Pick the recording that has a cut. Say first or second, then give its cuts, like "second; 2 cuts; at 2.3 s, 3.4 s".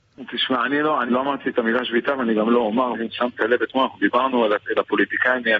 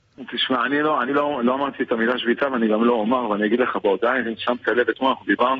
first; 2 cuts; at 1.1 s, 2.9 s